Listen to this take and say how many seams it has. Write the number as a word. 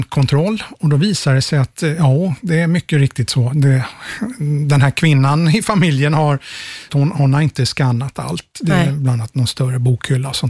one